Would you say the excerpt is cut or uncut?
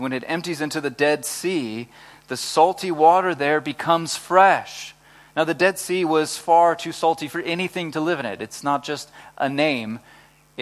uncut